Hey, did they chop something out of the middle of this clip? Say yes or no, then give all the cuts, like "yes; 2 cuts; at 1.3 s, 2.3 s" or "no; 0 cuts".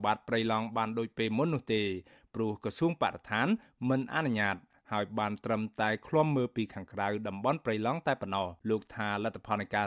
yes; 1 cut; at 8.6 s